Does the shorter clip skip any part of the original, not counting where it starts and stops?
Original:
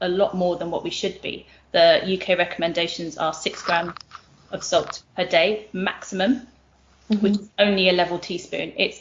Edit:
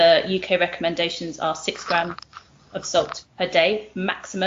no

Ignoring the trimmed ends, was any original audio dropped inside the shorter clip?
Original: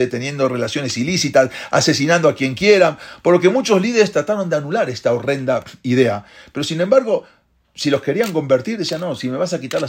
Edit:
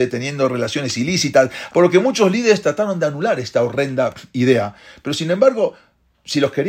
yes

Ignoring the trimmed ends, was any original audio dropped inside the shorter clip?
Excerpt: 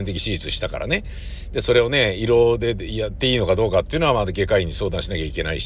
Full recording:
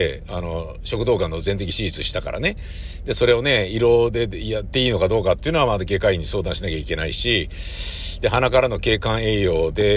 no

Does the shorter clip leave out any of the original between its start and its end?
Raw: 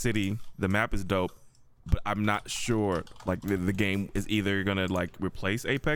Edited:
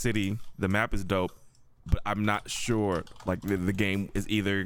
no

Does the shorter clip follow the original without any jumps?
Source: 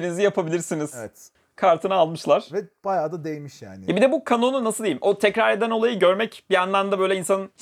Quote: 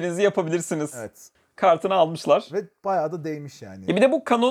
yes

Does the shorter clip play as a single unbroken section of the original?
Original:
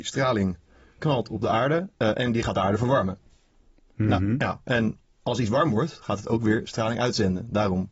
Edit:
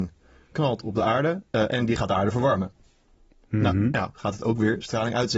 no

